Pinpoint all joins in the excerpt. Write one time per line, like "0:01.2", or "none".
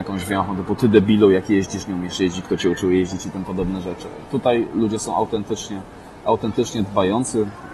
none